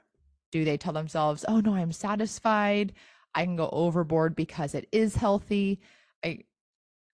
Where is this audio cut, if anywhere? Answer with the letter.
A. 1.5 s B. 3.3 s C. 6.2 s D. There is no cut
D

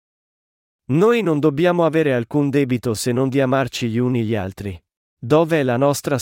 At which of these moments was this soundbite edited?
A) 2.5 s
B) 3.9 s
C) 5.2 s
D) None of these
C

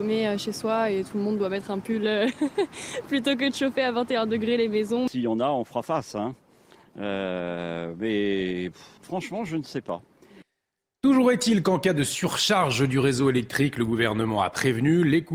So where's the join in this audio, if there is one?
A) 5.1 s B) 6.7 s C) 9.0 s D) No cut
C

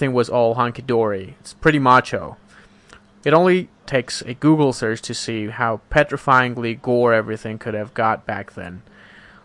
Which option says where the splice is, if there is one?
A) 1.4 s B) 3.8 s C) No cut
B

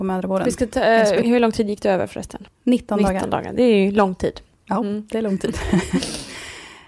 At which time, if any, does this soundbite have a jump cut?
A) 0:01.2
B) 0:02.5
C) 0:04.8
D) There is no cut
A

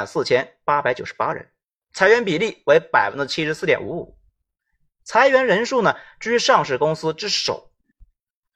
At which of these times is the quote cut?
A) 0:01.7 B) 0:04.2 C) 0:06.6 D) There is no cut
D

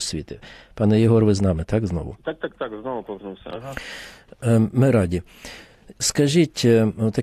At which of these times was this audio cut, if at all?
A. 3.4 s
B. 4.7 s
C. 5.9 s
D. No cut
D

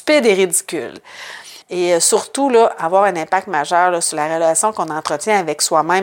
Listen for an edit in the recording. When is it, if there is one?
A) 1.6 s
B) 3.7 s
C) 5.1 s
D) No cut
A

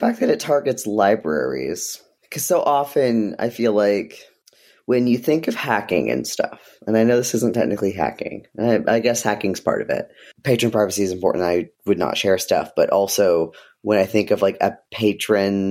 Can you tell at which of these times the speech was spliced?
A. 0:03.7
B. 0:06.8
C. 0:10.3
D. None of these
C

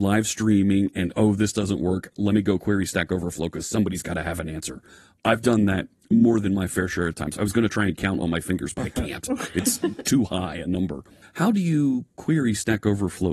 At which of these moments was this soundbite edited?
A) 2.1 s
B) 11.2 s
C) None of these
B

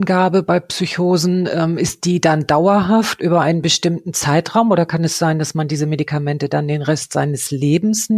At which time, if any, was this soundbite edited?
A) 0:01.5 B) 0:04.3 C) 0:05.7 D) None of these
D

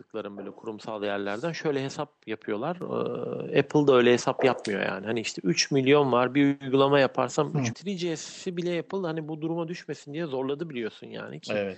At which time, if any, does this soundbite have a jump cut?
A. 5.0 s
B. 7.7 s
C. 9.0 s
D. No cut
B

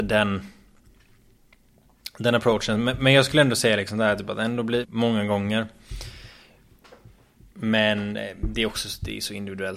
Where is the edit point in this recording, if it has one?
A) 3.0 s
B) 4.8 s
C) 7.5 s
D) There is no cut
B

